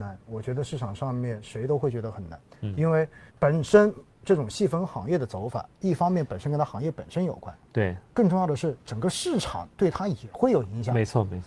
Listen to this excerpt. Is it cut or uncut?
cut